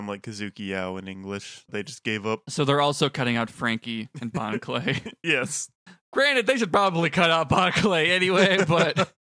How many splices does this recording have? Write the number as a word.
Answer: one